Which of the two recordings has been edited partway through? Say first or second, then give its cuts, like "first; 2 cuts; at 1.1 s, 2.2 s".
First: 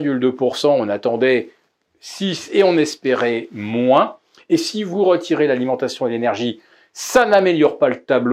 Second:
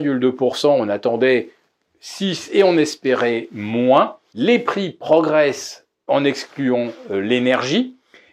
second; 2 cuts; at 4.3 s, 6.1 s